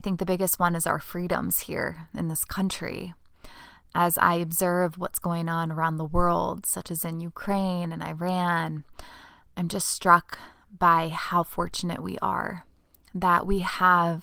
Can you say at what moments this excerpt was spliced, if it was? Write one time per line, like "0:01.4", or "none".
none